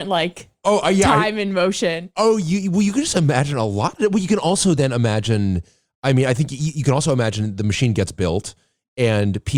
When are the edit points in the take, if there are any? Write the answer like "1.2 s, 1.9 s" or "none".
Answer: none